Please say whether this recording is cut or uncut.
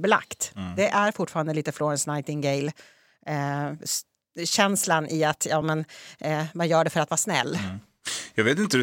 uncut